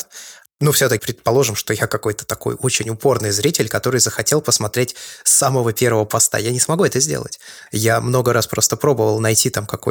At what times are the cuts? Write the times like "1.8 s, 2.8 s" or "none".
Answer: 1.0 s, 7.7 s